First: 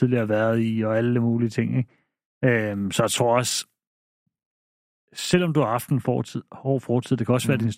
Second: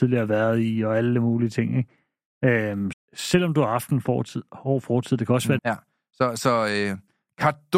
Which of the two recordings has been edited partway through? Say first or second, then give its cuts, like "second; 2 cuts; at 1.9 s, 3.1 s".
second; 2 cuts; at 2.9 s, 5.6 s